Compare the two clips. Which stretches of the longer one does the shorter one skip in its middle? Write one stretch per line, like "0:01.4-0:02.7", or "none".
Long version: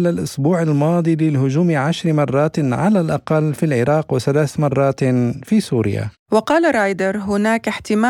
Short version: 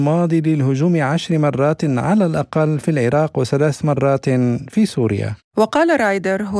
none